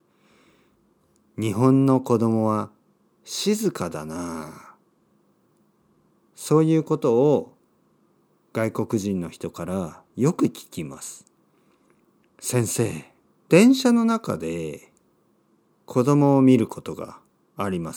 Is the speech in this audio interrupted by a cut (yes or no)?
yes